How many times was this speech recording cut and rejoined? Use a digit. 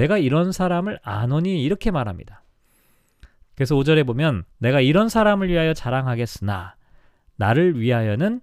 2